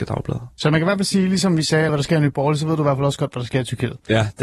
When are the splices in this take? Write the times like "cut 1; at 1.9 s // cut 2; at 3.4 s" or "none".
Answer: cut 1; at 1.9 s